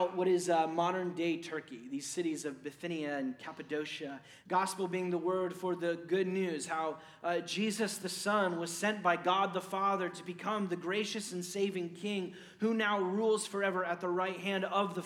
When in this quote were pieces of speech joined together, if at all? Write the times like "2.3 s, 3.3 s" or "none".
4.4 s